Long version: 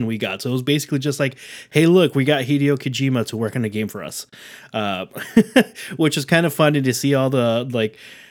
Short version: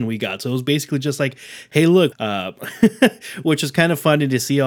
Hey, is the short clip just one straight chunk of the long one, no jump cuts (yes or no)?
no